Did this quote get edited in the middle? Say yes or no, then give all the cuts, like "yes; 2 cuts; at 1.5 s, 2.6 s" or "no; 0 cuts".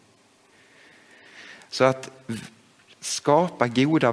no; 0 cuts